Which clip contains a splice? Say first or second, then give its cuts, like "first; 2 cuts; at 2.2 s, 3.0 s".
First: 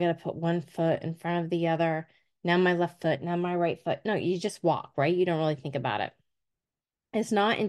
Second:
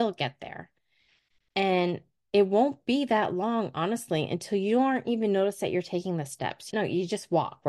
second; 1 cut; at 6.7 s